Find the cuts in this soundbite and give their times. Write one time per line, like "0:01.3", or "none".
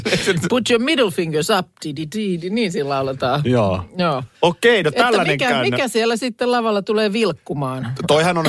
0:04.3